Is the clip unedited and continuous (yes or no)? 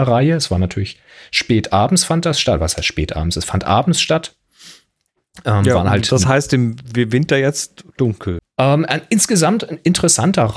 no